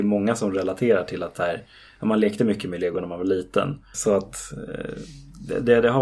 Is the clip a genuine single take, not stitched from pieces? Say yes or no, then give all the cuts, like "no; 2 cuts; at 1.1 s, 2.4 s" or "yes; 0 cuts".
no; 1 cut; at 3.9 s